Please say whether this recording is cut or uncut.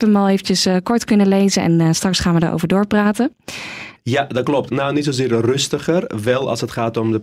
cut